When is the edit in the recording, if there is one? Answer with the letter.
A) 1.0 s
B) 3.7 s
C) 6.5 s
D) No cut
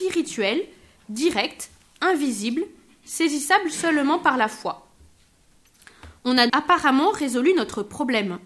C